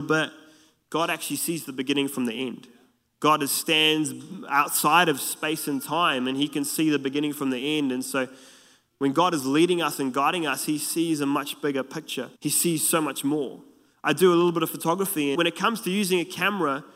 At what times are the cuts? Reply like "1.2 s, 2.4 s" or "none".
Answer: 12.4 s, 15.3 s